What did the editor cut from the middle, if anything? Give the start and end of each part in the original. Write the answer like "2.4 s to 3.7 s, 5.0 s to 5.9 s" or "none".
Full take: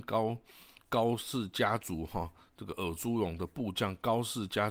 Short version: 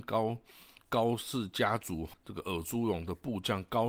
2.1 s to 2.5 s